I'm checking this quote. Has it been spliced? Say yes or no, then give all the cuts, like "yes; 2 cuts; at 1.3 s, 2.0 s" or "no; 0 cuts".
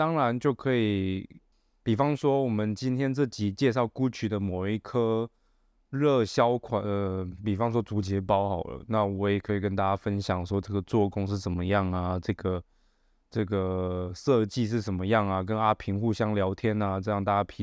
no; 0 cuts